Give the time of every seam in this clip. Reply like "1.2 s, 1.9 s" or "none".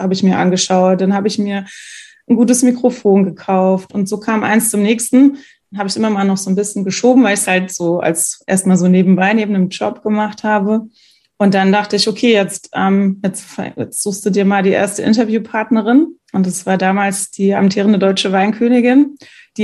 16.2 s